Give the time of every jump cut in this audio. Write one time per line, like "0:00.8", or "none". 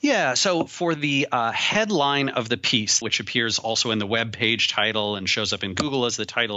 0:03.0